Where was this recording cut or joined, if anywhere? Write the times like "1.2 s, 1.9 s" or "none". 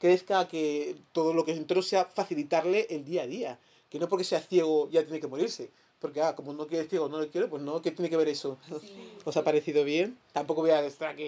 8.6 s